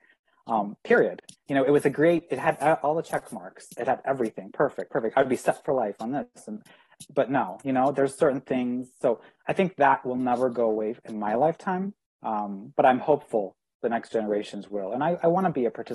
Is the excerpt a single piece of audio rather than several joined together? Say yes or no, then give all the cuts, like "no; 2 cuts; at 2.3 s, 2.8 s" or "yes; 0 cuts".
yes; 0 cuts